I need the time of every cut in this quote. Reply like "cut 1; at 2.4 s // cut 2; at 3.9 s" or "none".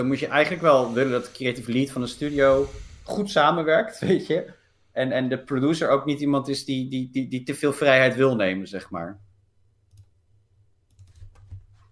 none